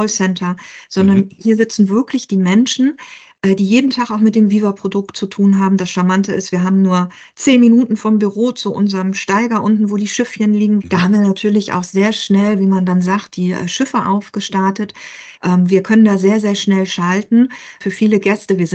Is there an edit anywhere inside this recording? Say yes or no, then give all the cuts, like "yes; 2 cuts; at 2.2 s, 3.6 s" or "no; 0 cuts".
yes; 3 cuts; at 10.8 s, 15.4 s, 17.8 s